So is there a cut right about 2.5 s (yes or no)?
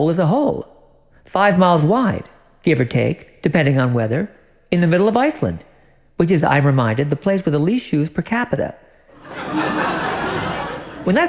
no